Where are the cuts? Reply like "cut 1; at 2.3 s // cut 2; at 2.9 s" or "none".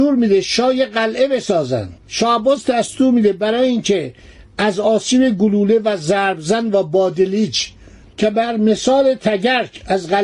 cut 1; at 2.0 s